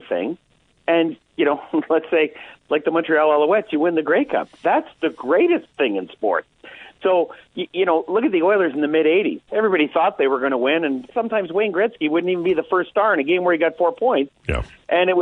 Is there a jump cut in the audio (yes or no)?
yes